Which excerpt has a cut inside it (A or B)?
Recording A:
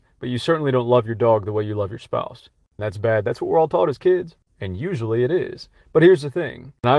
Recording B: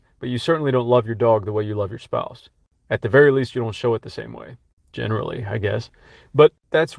A